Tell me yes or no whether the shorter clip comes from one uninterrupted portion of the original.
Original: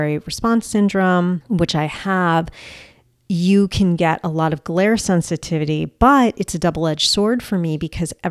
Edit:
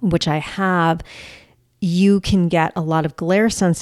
yes